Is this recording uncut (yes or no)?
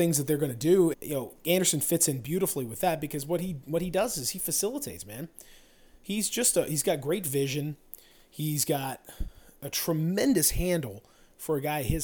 no